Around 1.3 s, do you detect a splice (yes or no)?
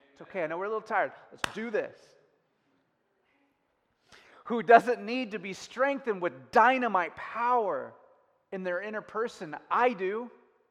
no